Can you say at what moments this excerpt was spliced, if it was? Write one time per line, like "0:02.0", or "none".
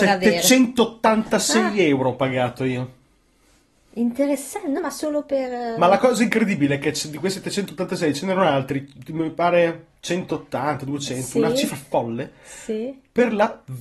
0:04.8